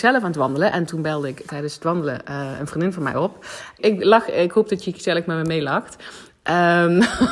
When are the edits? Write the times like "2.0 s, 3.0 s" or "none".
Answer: 3.8 s